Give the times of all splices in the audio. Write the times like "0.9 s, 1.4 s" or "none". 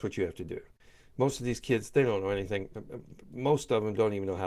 none